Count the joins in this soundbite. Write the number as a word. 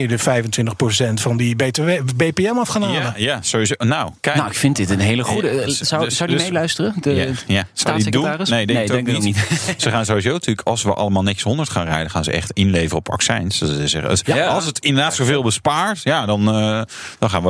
zero